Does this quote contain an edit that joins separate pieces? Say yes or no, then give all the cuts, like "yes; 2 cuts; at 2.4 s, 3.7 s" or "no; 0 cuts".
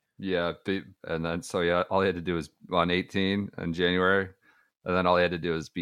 yes; 1 cut; at 1.0 s